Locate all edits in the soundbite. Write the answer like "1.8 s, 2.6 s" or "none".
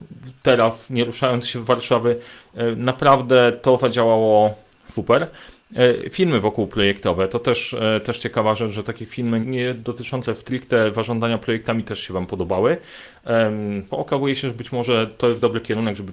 9.4 s, 13.9 s